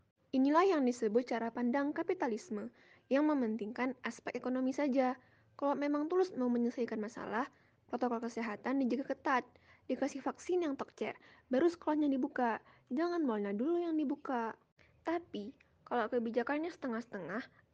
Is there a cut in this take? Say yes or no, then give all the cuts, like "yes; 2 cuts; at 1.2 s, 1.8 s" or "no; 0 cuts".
no; 0 cuts